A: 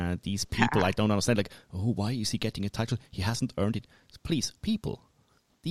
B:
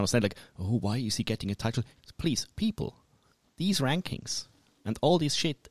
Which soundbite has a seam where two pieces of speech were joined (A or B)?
B